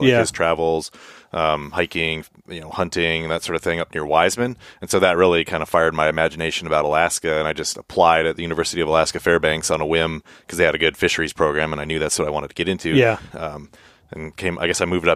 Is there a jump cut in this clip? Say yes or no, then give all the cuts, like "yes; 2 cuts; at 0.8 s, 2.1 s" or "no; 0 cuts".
yes; 1 cut; at 13.3 s